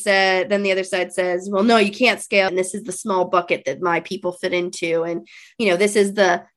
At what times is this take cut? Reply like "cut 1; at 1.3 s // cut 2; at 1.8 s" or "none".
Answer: cut 1; at 2.5 s